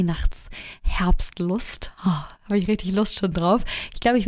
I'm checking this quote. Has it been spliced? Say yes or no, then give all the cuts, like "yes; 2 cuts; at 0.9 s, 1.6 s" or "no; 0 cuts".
no; 0 cuts